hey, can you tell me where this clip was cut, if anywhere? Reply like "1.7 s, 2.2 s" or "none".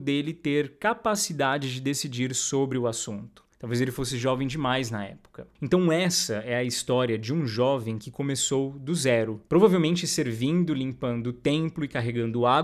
3.5 s